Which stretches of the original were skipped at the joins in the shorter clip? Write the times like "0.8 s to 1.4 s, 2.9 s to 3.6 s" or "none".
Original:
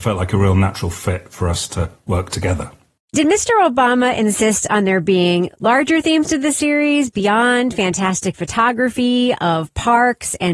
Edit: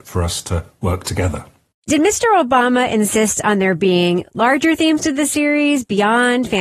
none